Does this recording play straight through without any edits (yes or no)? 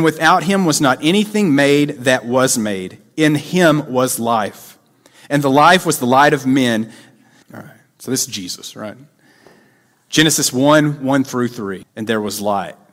no